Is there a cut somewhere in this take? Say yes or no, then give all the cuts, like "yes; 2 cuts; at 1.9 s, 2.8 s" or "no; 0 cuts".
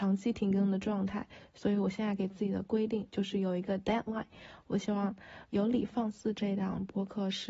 no; 0 cuts